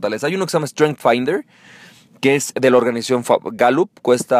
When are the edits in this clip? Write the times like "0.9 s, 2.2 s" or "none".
2.5 s